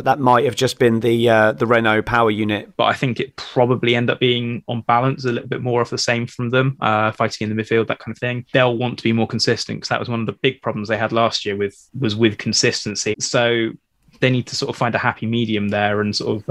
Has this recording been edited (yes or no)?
yes